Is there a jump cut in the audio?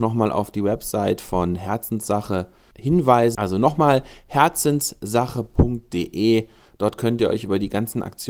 yes; 1 cut; at 3.3 s

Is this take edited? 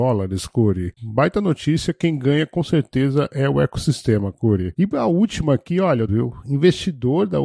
yes; 2 cuts; at 1.0 s, 6.1 s

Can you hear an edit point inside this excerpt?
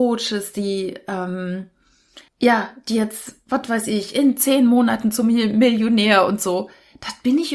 yes; 1 cut; at 2.3 s

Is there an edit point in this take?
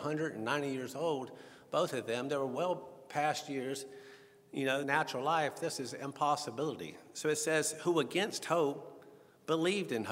yes; 1 cut; at 4.8 s

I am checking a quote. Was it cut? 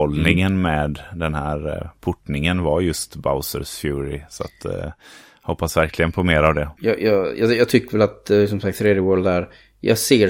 no; 0 cuts

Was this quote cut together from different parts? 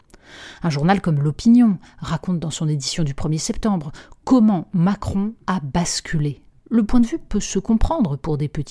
yes; 1 cut; at 6.5 s

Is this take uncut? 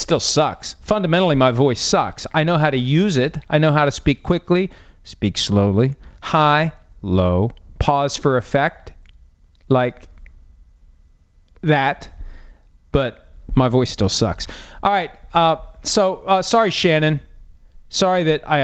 yes; 0 cuts

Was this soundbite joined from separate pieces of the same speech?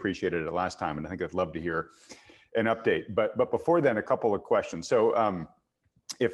no; 0 cuts

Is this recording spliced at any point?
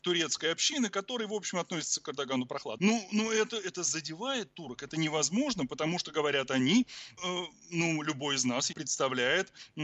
yes; 3 cuts; at 2.8 s, 7.2 s, 8.7 s

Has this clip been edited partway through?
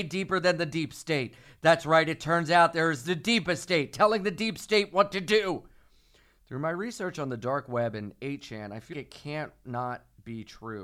yes; 1 cut; at 8.9 s

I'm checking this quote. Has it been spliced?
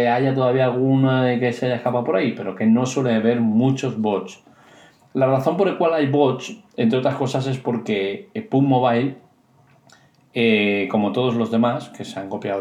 no; 0 cuts

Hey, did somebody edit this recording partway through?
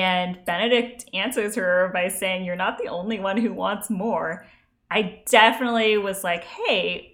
no; 0 cuts

